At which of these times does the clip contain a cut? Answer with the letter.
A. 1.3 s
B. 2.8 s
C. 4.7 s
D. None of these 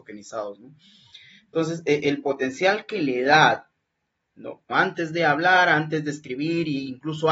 C